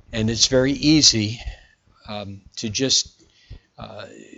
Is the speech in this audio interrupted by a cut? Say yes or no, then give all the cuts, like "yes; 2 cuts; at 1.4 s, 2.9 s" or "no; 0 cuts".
no; 0 cuts